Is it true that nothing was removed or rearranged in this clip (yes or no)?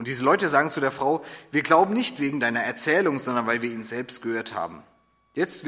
yes